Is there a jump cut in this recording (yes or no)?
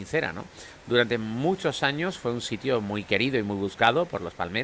no